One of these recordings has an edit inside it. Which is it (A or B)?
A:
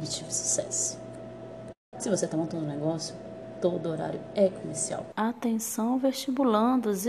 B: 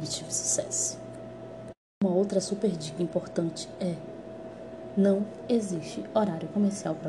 A